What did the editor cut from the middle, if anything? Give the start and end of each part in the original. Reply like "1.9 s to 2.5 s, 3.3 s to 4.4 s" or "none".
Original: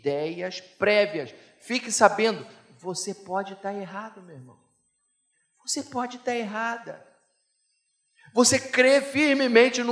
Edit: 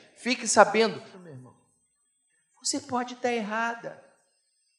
2.6 s to 4.2 s